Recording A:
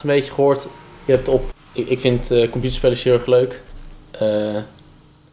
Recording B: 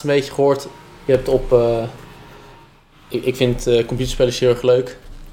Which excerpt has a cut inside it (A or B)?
A